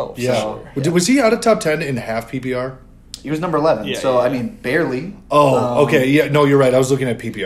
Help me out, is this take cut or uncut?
uncut